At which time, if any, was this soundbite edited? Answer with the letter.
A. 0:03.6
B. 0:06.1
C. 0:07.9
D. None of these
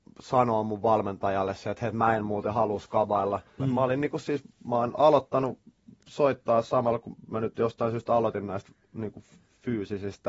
A